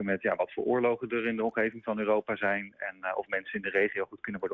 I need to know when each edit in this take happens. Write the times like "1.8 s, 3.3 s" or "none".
none

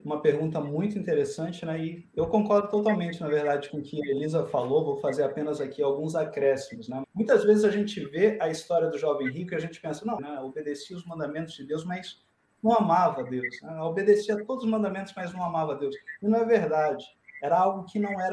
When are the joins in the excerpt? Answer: 7.0 s, 10.2 s

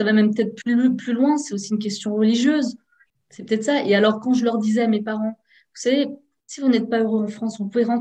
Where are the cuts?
3.1 s

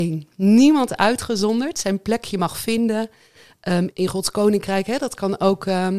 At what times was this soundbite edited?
3.9 s

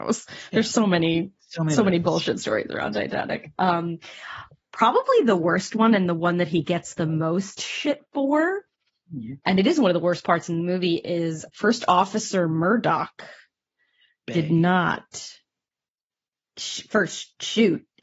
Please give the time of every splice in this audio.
11.5 s

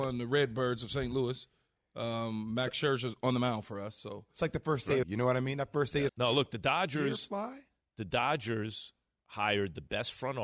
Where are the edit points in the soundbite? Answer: 5.0 s, 6.1 s

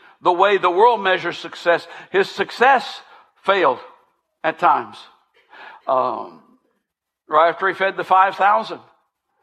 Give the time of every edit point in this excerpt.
none

